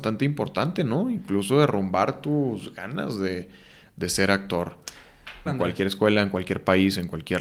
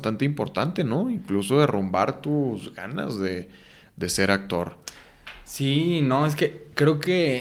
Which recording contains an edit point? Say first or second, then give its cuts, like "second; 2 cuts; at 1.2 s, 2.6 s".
first; 1 cut; at 5.5 s